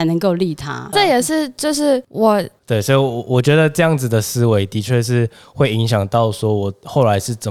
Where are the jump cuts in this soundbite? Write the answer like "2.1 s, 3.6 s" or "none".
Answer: 0.9 s, 2.6 s